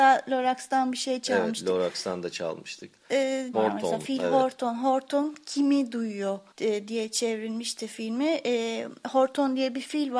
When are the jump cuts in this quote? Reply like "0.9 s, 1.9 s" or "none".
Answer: 3.5 s, 6.5 s